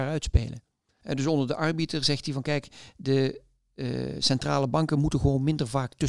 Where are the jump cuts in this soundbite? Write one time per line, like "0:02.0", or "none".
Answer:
0:01.0